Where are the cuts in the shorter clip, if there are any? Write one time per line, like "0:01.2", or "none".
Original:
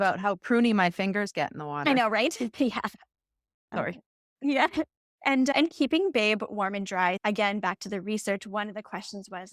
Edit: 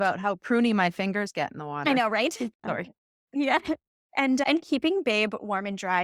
0:02.5